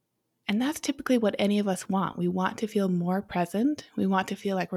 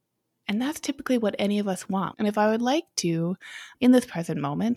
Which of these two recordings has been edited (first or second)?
second